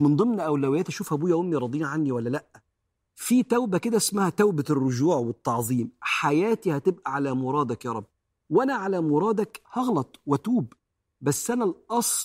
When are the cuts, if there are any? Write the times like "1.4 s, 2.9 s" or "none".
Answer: none